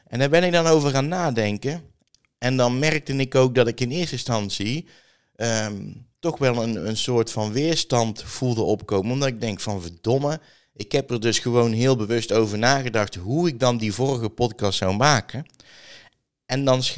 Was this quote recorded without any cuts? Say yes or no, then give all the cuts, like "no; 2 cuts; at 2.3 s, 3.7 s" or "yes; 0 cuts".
yes; 0 cuts